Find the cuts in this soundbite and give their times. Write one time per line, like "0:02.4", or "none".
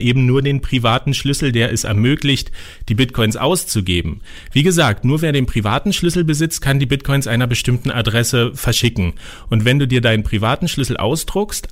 none